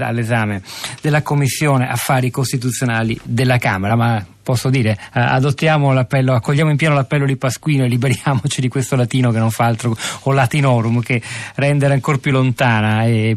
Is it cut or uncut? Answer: uncut